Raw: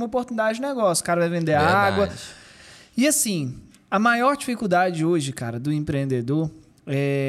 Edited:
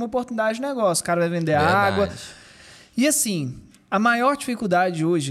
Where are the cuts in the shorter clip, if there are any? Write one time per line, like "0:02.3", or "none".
none